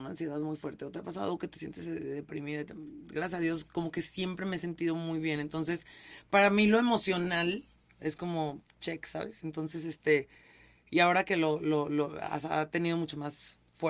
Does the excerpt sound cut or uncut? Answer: uncut